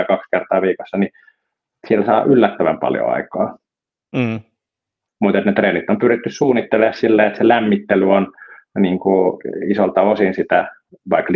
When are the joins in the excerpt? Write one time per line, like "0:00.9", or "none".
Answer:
0:05.1